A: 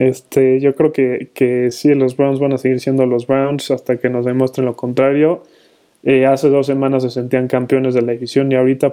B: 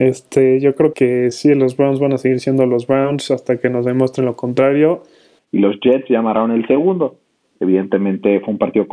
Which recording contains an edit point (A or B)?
B